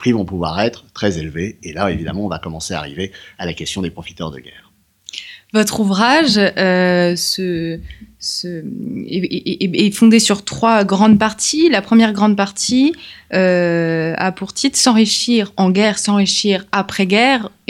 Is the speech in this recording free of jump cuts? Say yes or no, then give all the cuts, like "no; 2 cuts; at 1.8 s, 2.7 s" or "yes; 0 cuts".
yes; 0 cuts